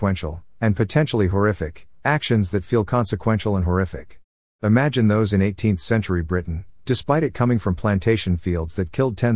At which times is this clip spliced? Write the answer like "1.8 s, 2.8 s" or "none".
6.8 s